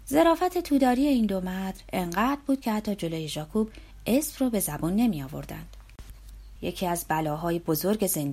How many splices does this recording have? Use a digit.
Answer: 1